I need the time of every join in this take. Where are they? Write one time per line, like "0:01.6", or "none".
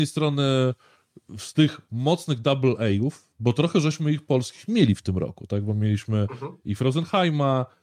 none